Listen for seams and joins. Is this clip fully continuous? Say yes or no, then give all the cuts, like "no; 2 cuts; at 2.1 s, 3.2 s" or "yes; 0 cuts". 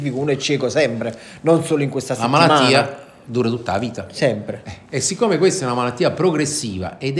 yes; 0 cuts